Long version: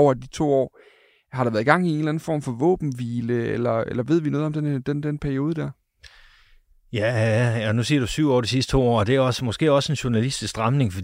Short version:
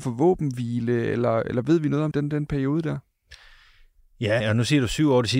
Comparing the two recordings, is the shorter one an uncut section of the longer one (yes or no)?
no